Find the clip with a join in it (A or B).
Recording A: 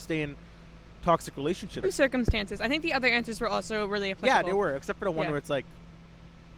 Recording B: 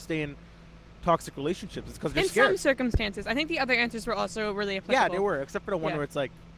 A